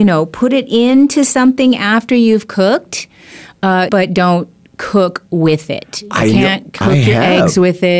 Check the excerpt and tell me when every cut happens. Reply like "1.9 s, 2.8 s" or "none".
3.9 s